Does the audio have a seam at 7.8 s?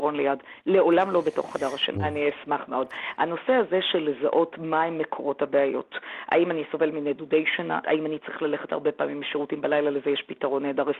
yes; 3 cuts; at 1.9 s, 3.2 s, 7.8 s

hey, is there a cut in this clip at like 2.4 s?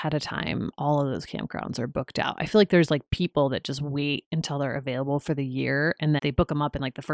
no; 1 cut; at 6.2 s

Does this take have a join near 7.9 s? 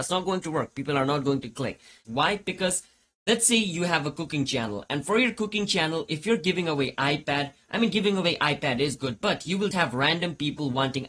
no; 2 cuts; at 2.0 s, 9.7 s

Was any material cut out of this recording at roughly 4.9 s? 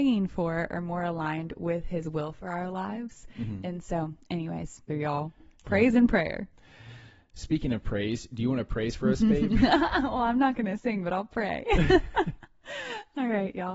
yes; 1 cut; at 4.9 s

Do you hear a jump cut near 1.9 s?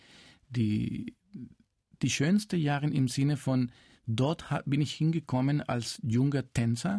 no; 0 cuts

